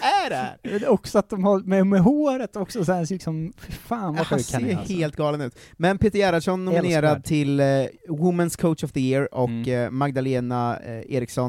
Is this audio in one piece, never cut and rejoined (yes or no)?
yes